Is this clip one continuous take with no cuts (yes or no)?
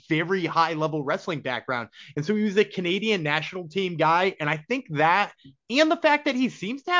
yes